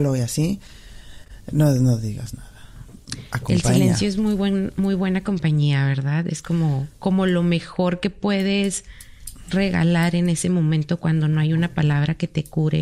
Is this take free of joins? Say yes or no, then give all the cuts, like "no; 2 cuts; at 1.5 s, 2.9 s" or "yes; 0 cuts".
yes; 0 cuts